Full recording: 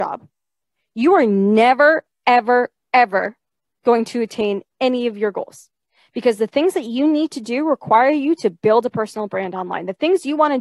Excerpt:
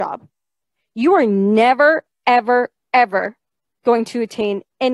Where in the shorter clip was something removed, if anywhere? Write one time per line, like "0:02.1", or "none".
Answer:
none